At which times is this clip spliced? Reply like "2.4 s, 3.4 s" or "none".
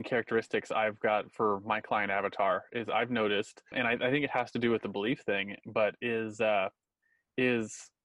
3.7 s